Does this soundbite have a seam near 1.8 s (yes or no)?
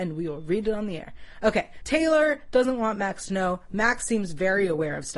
yes